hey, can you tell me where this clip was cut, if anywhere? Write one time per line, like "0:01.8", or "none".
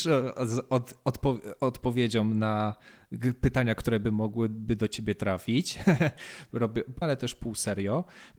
0:07.0